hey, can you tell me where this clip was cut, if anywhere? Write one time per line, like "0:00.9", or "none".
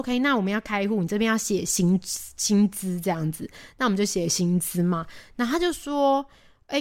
none